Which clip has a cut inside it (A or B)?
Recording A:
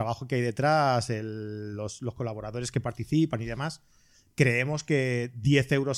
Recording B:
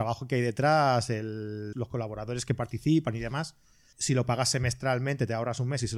B